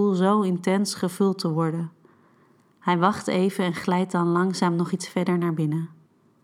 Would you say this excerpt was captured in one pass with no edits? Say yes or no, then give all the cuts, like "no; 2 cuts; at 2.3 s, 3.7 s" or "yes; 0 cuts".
yes; 0 cuts